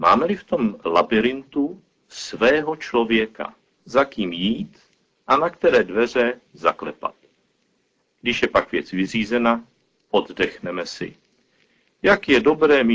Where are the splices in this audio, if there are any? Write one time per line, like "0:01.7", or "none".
0:03.8